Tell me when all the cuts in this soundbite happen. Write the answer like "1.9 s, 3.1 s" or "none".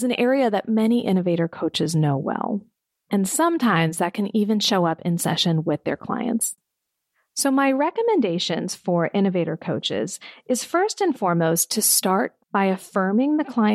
none